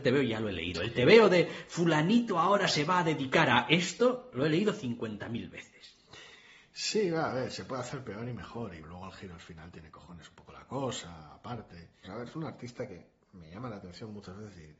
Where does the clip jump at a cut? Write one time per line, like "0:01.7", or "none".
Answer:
0:08.8
0:12.0